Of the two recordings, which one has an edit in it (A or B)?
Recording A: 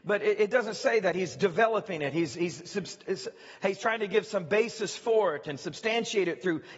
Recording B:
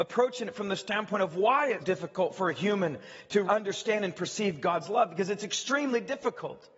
B